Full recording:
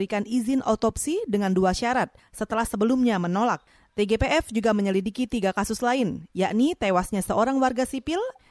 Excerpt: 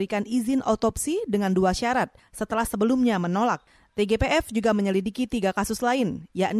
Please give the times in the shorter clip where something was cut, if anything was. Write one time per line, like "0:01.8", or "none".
none